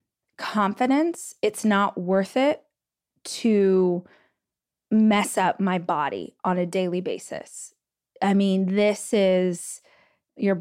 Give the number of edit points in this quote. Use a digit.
0